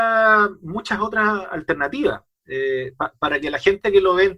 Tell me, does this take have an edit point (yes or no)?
no